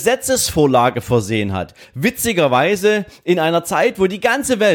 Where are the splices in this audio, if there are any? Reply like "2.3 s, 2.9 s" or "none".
none